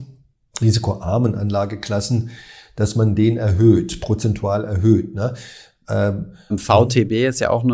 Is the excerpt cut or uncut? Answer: cut